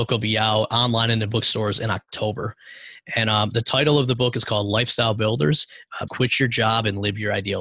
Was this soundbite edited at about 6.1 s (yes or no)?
yes